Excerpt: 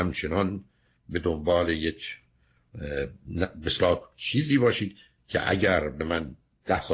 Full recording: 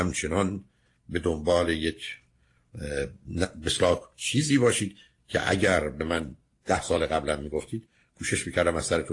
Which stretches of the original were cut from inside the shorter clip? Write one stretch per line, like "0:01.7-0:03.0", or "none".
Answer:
none